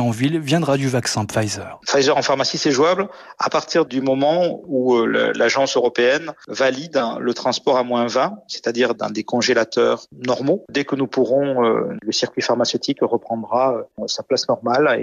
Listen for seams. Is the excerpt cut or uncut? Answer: uncut